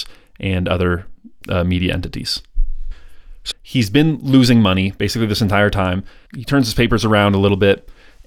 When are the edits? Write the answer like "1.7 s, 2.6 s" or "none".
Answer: 3.5 s, 6.3 s